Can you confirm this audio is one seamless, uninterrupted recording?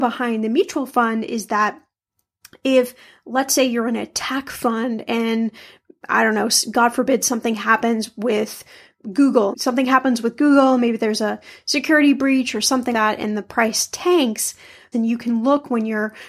no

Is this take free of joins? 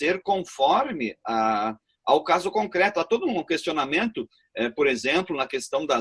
yes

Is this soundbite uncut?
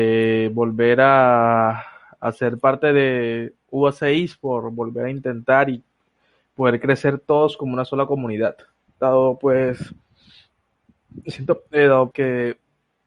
no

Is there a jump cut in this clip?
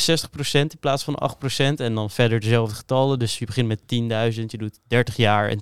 no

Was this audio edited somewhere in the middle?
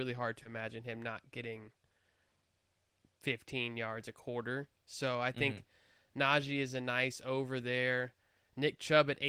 no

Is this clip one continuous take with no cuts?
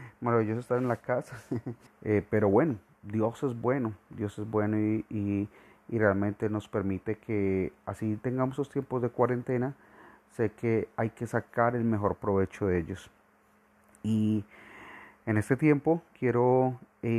no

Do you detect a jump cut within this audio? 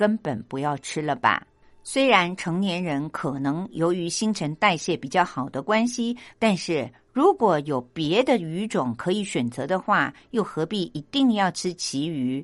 yes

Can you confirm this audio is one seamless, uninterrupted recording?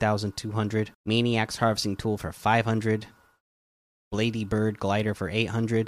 no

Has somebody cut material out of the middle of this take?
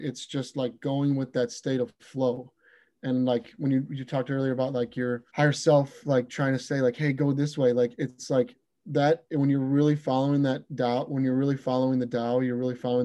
yes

